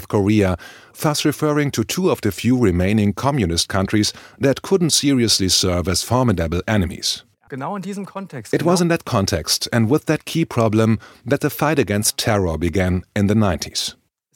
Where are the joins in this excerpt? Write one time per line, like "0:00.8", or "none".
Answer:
0:07.5